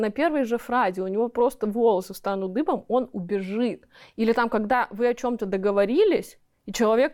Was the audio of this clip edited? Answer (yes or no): no